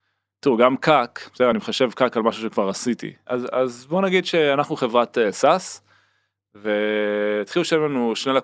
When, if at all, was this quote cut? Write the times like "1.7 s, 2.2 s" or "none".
none